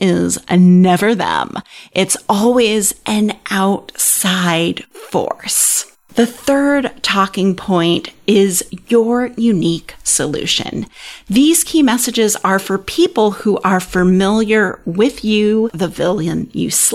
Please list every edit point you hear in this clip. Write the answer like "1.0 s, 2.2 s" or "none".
15.7 s